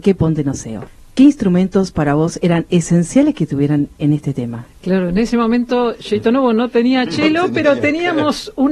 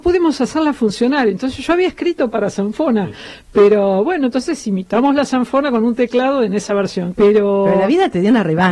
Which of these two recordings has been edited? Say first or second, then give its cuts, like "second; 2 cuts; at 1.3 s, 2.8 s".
second; 1 cut; at 7.1 s